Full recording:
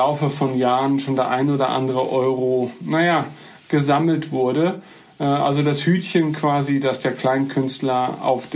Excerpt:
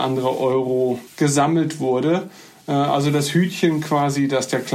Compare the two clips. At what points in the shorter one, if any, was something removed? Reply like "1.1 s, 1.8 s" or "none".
1.1 s